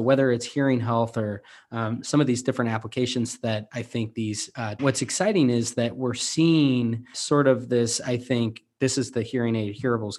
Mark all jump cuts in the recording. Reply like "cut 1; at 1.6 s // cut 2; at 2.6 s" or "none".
cut 1; at 4.8 s // cut 2; at 7.1 s